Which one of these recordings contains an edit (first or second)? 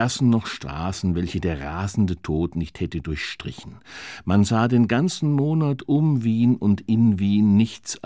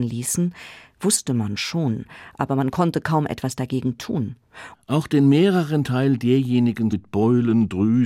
second